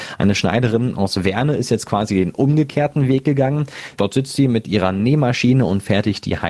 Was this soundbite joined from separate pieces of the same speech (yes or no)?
yes